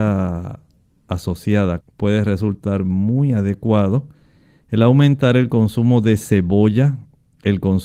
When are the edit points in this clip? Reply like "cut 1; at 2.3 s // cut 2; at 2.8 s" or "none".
cut 1; at 1.8 s